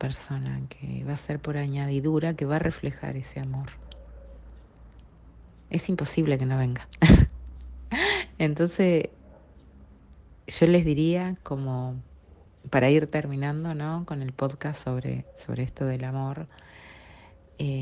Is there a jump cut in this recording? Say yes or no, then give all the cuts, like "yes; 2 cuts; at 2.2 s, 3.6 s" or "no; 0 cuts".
no; 0 cuts